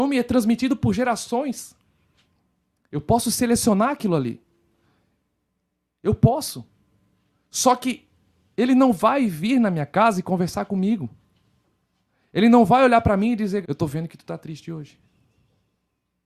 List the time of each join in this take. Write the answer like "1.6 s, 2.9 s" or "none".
13.6 s

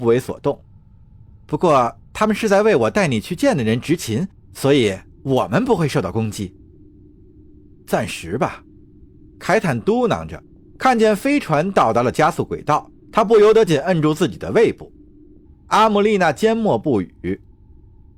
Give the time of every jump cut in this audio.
13.7 s, 15.4 s

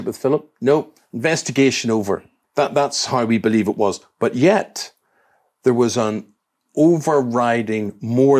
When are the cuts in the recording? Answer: 2.4 s

